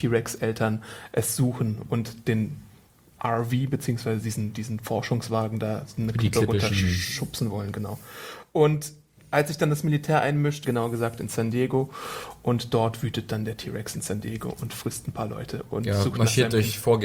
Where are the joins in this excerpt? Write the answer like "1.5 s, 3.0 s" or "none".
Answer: 10.6 s